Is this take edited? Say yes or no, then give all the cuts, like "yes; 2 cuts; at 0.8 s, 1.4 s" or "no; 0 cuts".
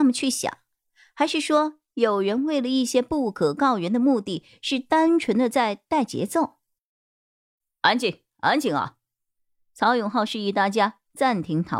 no; 0 cuts